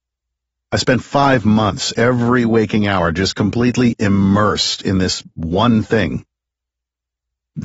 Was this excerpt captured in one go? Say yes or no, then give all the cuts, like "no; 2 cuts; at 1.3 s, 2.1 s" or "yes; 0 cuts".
yes; 0 cuts